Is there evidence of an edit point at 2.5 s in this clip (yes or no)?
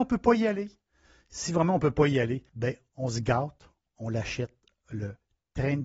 yes